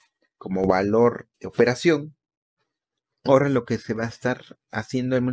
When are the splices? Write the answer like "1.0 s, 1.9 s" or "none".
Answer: 1.3 s